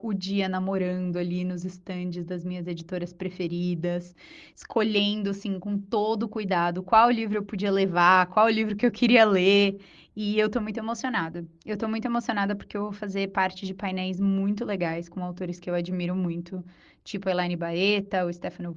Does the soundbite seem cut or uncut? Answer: uncut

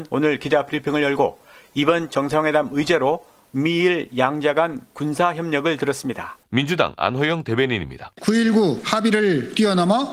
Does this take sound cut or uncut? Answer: cut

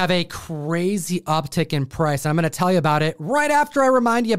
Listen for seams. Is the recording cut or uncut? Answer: uncut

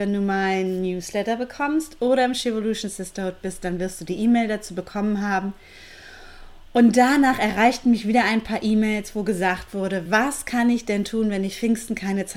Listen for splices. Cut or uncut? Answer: uncut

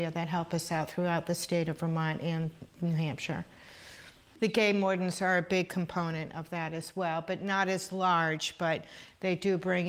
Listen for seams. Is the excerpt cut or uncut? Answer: uncut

